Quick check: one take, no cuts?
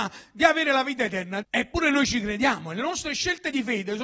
no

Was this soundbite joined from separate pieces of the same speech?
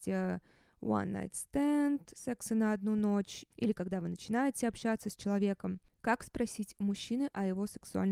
no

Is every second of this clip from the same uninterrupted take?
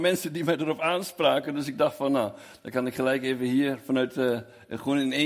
yes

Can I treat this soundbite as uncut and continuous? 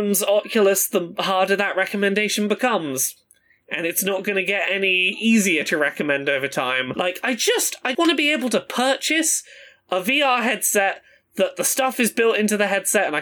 no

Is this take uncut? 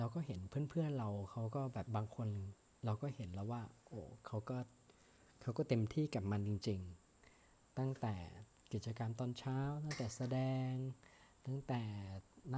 no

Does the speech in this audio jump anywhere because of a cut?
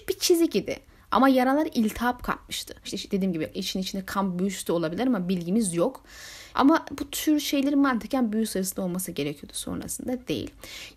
yes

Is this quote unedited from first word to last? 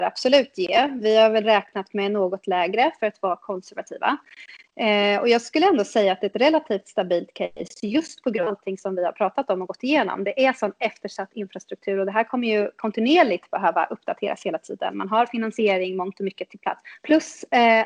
yes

